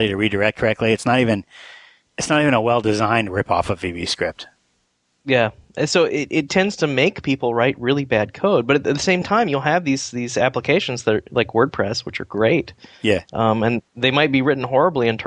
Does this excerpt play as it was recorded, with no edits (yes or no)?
yes